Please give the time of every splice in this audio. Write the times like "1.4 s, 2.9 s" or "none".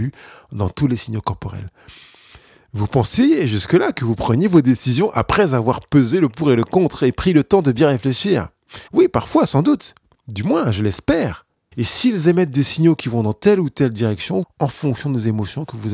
8.9 s, 11.7 s, 14.4 s